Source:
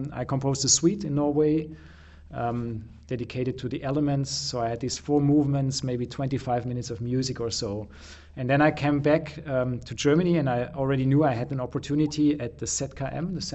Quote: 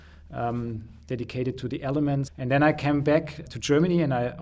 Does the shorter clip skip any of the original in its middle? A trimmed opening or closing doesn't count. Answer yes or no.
yes